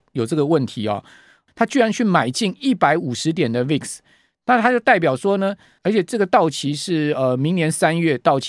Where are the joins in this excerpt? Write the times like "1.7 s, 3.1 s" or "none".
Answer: 1.5 s, 5.8 s